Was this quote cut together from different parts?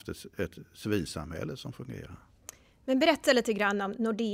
no; 0 cuts

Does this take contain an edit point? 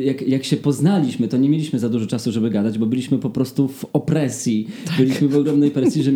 no; 0 cuts

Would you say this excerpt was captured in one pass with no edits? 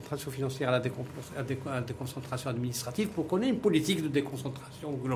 yes; 0 cuts

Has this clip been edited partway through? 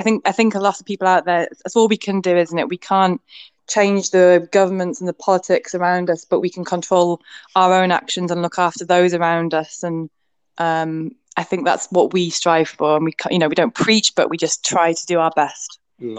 no; 0 cuts

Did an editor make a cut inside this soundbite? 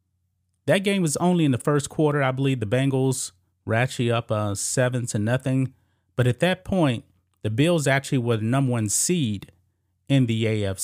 no; 0 cuts

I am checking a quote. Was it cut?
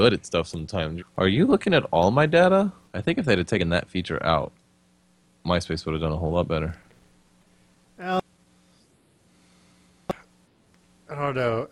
yes; 2 cuts; at 1.0 s, 2.9 s

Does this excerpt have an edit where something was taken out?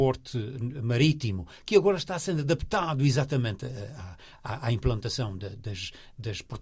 no; 0 cuts

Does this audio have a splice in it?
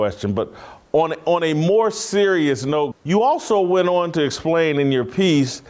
yes; 1 cut; at 2.9 s

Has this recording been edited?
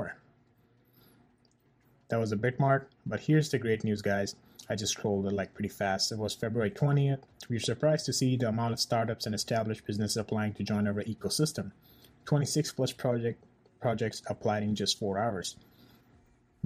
no; 0 cuts

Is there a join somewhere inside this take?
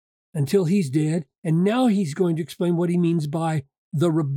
no; 0 cuts

